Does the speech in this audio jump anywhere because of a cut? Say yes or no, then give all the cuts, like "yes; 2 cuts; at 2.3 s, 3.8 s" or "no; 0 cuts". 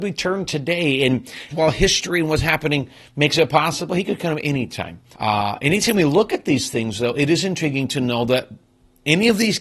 yes; 2 cuts; at 1.5 s, 5.1 s